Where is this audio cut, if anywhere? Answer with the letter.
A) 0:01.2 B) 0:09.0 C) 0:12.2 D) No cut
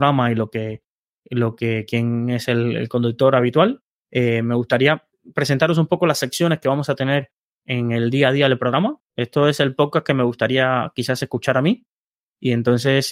B